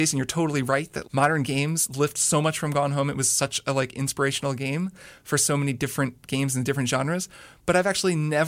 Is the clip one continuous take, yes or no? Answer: no